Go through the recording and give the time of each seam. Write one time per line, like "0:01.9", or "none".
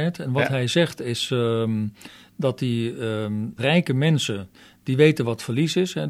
0:03.6